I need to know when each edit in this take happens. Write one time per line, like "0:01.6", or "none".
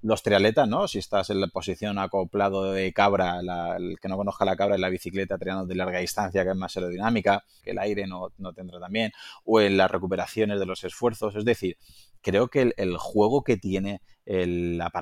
0:07.6